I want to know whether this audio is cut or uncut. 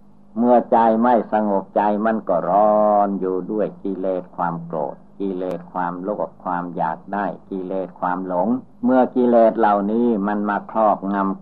cut